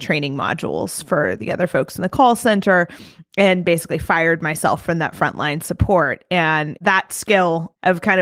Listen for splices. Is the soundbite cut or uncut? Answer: uncut